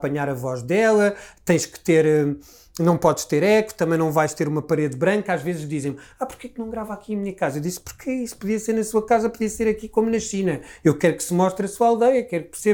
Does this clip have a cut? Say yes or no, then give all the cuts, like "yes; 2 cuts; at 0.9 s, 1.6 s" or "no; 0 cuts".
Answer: no; 0 cuts